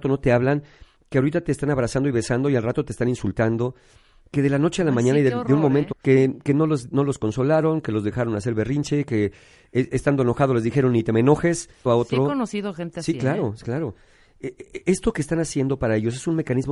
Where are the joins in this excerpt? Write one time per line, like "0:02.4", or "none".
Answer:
0:05.9
0:11.9